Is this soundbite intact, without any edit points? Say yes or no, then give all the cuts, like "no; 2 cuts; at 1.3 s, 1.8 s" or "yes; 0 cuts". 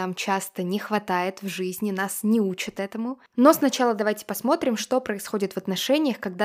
yes; 0 cuts